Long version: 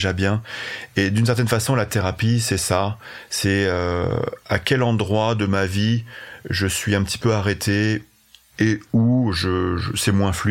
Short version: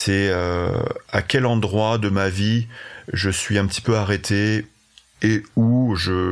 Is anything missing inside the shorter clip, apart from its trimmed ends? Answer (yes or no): no